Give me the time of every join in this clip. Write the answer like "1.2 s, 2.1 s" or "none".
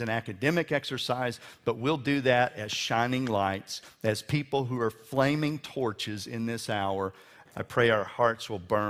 7.5 s